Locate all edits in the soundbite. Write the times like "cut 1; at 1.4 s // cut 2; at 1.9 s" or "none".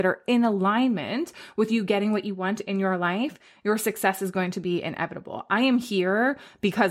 none